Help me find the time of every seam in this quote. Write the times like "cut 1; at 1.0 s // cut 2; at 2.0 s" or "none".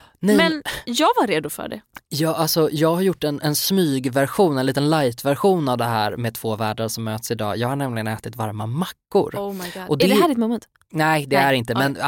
none